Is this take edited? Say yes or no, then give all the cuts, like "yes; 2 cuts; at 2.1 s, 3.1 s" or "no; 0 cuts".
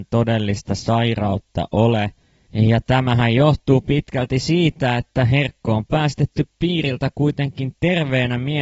no; 0 cuts